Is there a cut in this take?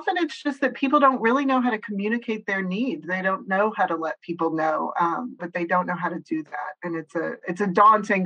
yes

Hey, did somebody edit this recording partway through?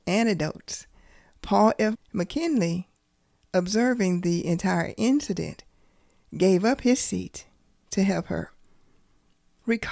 yes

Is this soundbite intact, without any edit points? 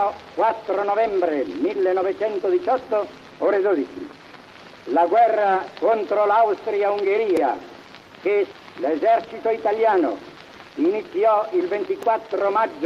yes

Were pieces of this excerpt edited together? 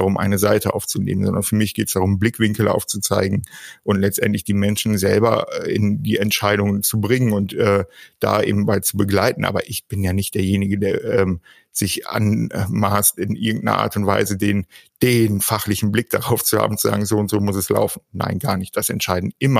no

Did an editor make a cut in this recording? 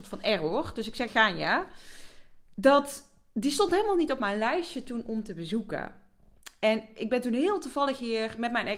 yes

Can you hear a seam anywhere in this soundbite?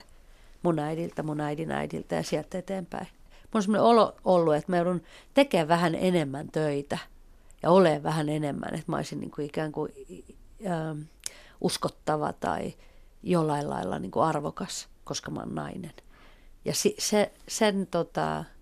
yes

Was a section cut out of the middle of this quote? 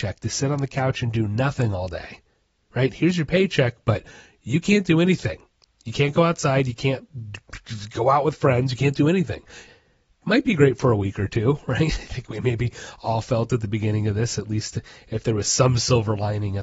yes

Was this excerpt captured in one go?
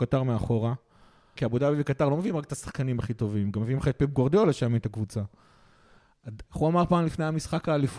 no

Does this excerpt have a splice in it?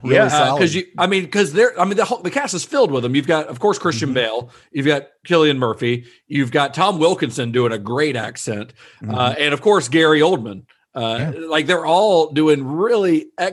no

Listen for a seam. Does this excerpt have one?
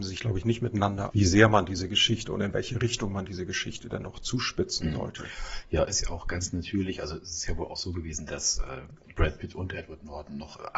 yes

